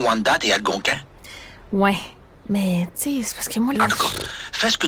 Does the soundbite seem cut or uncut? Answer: cut